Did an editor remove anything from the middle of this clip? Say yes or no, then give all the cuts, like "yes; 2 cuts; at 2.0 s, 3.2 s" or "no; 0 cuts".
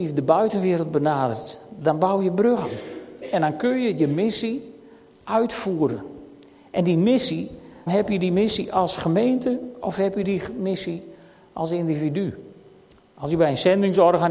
yes; 1 cut; at 7.9 s